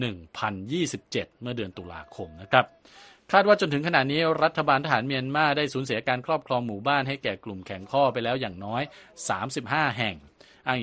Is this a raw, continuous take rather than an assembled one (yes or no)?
yes